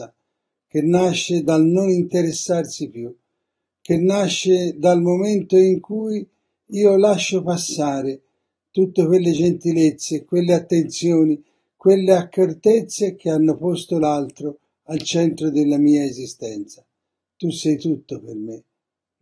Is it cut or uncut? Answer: uncut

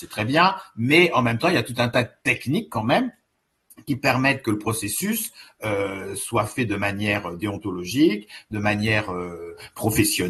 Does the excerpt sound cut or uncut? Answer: uncut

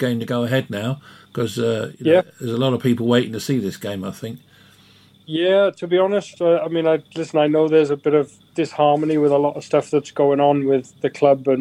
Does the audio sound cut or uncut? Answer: uncut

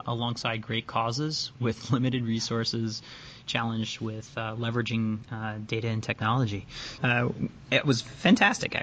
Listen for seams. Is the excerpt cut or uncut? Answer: cut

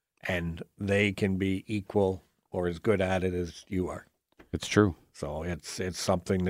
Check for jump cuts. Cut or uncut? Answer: uncut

